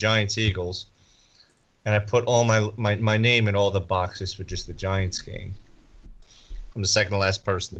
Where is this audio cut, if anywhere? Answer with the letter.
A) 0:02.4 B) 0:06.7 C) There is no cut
B